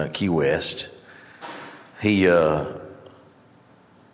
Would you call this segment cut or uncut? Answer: uncut